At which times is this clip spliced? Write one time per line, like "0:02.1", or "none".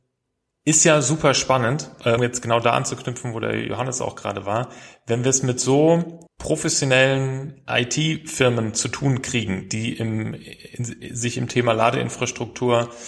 0:02.2
0:06.3